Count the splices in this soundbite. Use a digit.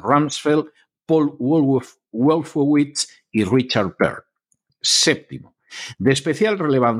1